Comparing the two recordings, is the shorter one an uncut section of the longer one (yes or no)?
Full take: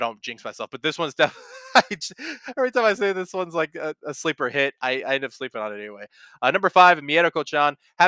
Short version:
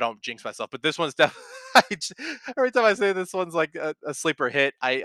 yes